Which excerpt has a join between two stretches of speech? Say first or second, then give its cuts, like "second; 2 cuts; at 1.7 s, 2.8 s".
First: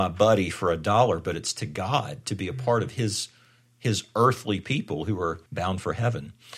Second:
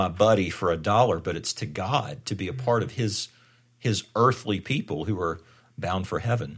first; 1 cut; at 5.5 s